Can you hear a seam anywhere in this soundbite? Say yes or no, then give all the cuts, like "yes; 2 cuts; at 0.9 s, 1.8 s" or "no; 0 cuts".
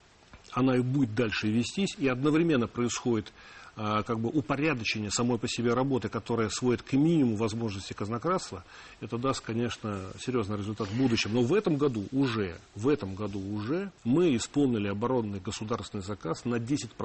yes; 2 cuts; at 12.7 s, 14.0 s